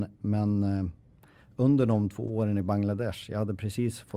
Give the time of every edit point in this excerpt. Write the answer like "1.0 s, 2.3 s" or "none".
none